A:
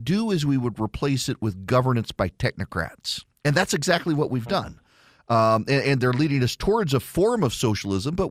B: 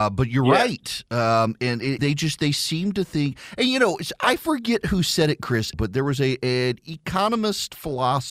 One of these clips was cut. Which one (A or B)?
B